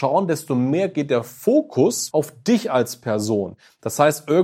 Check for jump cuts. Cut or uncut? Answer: cut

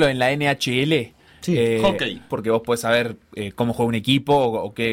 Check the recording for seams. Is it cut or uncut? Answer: cut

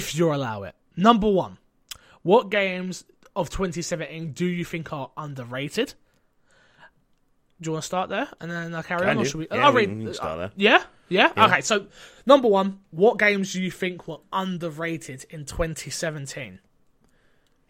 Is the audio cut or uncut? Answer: uncut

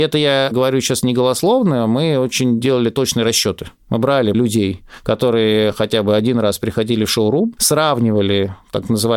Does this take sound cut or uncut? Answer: cut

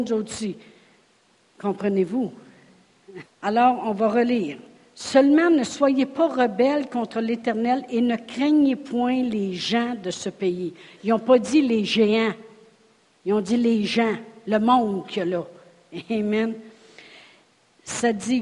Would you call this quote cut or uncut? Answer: cut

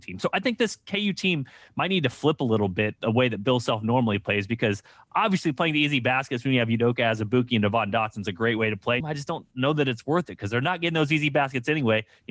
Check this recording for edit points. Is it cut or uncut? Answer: cut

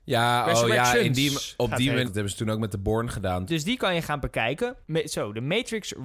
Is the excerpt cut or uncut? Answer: cut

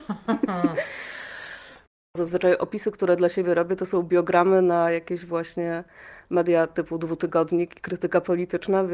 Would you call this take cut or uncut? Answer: uncut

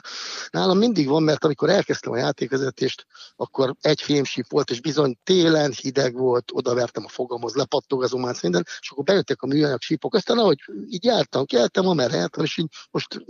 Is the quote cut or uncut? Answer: cut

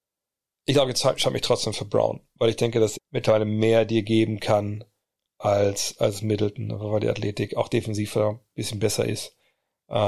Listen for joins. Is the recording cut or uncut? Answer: cut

